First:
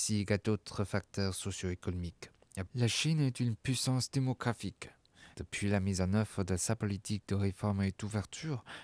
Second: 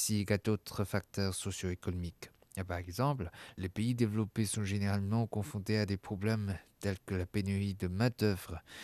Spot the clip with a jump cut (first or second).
first